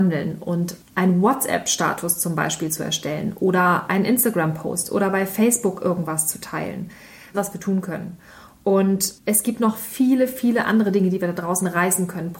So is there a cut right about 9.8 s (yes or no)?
no